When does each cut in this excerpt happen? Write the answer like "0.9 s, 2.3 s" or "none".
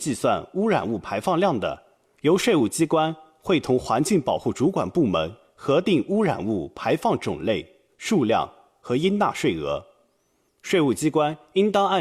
10.5 s